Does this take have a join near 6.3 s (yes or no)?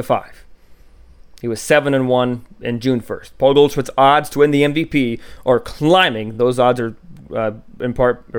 no